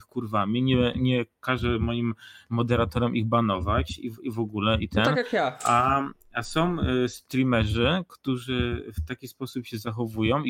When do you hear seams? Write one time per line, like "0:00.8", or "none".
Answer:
none